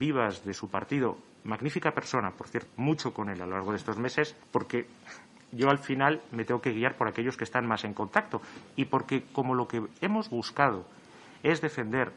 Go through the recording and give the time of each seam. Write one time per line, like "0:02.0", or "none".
0:02.7
0:04.4